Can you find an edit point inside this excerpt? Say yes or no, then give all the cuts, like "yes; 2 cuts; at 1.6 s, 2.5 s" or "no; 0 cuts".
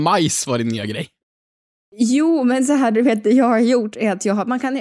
no; 0 cuts